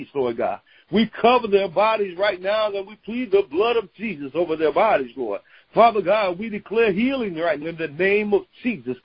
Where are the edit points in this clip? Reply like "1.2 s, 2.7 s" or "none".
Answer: 7.6 s